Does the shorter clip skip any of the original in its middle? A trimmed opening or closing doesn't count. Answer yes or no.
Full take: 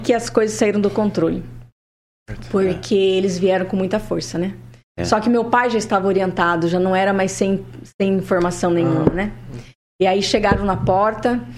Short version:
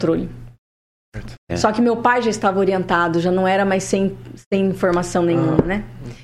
yes